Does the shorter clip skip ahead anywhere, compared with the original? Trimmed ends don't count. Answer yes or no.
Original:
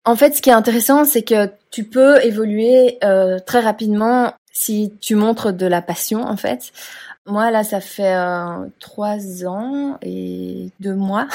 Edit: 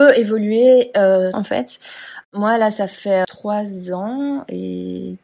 yes